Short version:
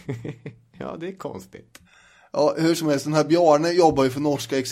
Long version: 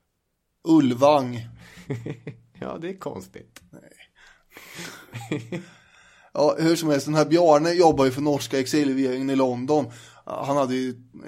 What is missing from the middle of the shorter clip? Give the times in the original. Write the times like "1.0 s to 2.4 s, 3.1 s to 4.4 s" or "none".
3.7 s to 5.9 s